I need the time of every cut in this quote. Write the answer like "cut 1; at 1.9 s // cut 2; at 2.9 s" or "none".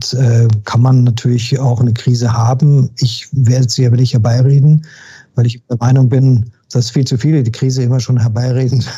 none